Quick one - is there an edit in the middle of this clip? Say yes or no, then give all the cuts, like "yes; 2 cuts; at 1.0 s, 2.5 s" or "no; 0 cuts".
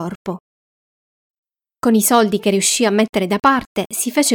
no; 0 cuts